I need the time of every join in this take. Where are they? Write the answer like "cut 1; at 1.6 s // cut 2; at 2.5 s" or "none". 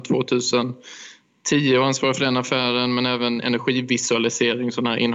none